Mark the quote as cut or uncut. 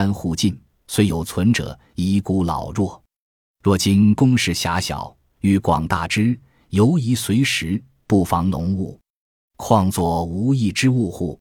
uncut